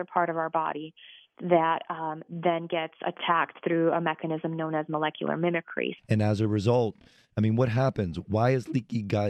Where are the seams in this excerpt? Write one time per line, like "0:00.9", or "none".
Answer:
0:06.0